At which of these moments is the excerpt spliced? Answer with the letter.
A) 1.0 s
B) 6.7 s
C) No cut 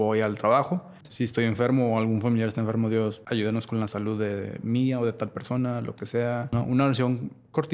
A